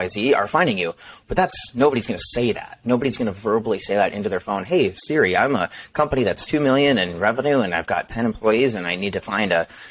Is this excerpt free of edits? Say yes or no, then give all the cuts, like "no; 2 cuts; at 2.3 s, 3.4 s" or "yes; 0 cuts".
yes; 0 cuts